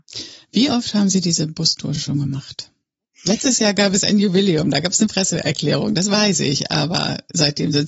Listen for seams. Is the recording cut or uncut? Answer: uncut